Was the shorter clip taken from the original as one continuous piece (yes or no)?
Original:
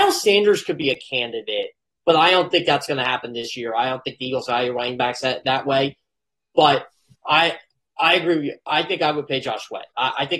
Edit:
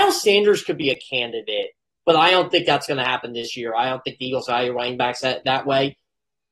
yes